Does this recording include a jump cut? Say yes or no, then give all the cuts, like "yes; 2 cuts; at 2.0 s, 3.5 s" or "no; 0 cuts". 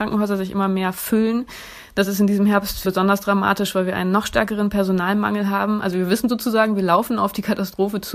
yes; 1 cut; at 2.8 s